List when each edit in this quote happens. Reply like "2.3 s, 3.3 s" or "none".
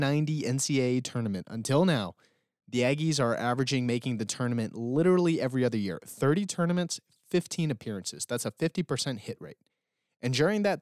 none